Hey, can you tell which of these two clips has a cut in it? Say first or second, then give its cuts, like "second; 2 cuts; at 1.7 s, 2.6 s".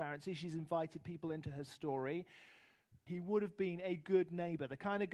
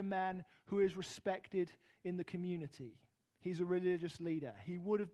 first; 1 cut; at 3.1 s